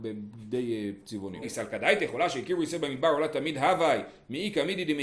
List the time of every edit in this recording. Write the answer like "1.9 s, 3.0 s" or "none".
1.4 s